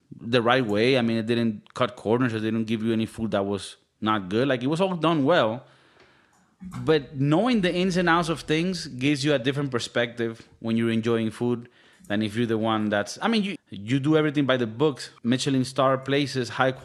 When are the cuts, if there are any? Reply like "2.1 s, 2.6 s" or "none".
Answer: 13.6 s, 15.2 s